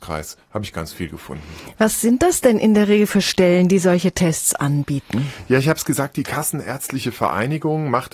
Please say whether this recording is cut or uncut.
uncut